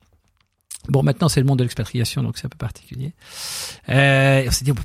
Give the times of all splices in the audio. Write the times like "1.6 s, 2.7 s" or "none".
3.8 s